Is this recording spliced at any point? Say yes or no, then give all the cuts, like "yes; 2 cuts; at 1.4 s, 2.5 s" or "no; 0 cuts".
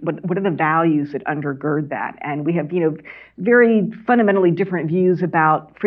no; 0 cuts